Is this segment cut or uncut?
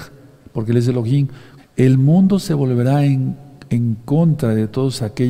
cut